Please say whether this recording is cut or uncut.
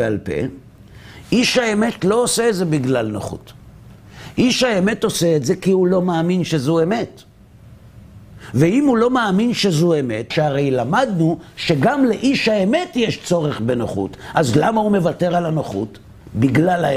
cut